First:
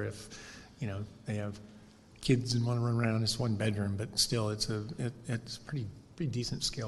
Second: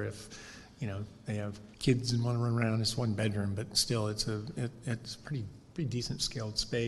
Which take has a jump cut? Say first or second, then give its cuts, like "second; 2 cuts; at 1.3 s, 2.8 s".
second; 1 cut; at 1.7 s